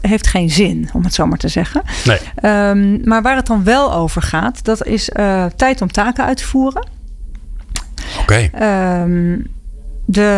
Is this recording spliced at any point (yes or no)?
no